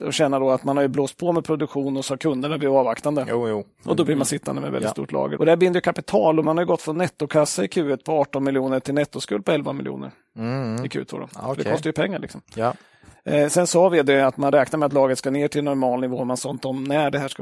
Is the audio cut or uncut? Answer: cut